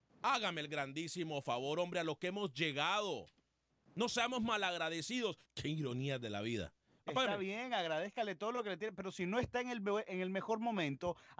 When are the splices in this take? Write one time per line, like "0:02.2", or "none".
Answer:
0:05.4
0:07.0